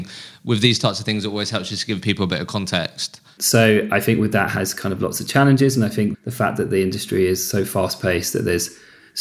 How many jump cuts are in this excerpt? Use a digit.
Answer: 2